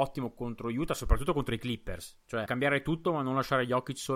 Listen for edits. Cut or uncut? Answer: cut